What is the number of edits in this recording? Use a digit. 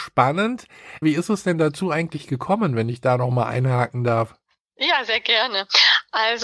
1